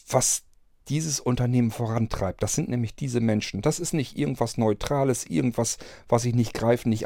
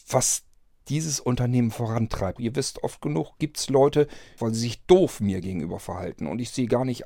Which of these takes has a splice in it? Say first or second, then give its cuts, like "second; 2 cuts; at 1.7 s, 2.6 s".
second; 2 cuts; at 2.4 s, 4.4 s